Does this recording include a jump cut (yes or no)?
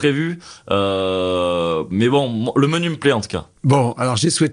yes